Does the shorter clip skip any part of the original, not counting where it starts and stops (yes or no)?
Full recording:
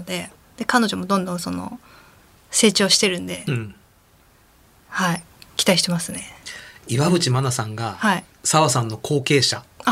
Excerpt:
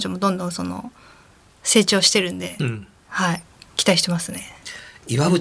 yes